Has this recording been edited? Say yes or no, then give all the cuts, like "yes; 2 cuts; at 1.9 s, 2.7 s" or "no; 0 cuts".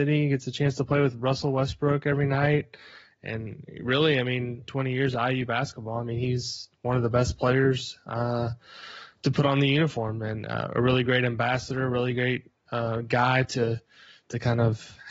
yes; 1 cut; at 4.7 s